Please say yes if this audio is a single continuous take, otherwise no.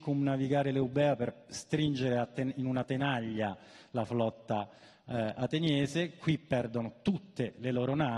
yes